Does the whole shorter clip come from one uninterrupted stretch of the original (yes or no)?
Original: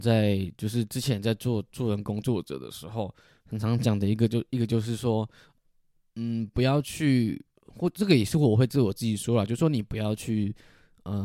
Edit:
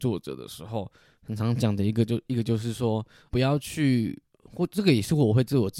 no